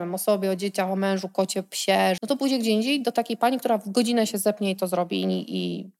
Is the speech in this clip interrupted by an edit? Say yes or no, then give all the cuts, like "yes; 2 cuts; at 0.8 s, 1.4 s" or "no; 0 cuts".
yes; 1 cut; at 2.2 s